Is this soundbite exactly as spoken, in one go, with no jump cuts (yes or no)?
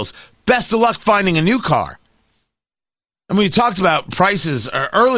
yes